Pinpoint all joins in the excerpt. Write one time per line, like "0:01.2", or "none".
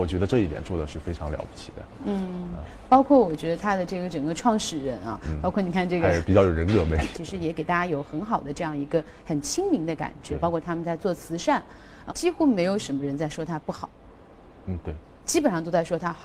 0:07.1
0:12.1